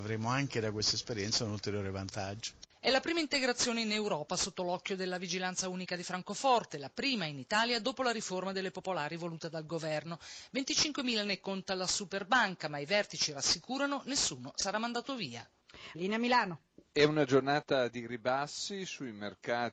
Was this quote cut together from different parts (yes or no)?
yes